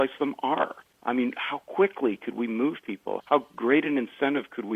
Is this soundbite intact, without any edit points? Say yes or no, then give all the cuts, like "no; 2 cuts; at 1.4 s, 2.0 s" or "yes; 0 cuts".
yes; 0 cuts